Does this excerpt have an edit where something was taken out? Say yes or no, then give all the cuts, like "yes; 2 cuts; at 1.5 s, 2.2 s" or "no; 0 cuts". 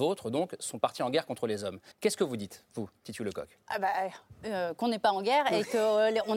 yes; 1 cut; at 1.9 s